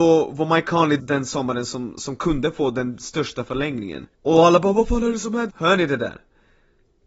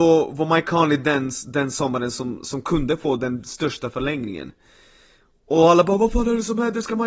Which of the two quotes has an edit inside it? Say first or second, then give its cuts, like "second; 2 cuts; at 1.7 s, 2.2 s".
first; 3 cuts; at 1.0 s, 4.1 s, 5.5 s